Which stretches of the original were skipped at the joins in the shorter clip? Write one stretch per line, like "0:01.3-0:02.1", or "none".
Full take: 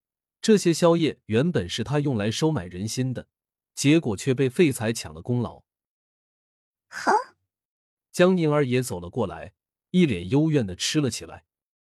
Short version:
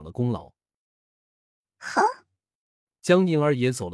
none